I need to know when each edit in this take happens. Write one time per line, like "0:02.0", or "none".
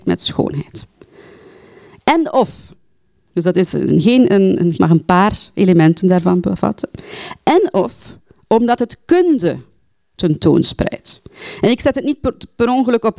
0:04.7